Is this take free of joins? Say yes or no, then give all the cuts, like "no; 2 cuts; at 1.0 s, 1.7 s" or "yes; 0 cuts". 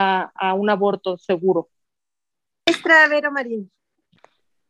yes; 0 cuts